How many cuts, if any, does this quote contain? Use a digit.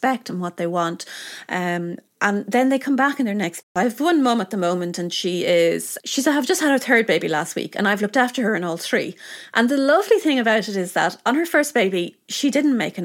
1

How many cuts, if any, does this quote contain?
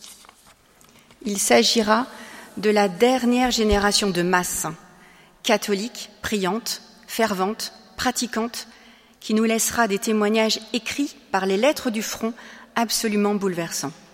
0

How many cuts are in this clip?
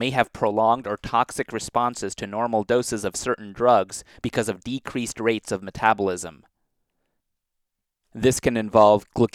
1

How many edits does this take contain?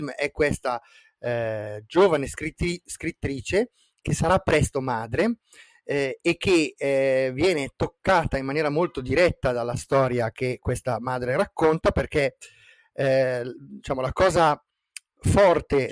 0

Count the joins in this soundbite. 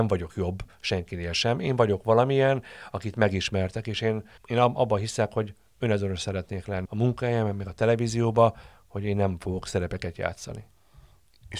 2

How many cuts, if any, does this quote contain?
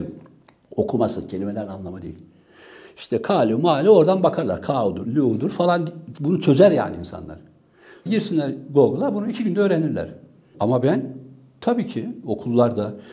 3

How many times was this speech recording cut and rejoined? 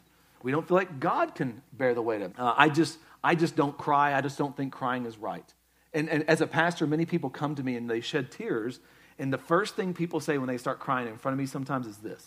1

